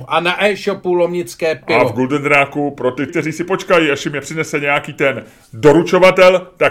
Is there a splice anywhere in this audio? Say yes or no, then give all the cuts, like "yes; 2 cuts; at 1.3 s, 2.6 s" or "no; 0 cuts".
yes; 1 cut; at 3.1 s